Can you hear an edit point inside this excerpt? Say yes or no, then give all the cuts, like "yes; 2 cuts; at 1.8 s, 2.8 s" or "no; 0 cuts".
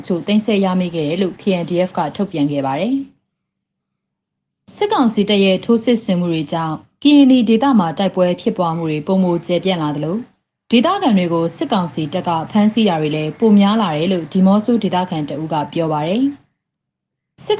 no; 0 cuts